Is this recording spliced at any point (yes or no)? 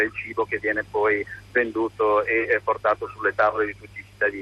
no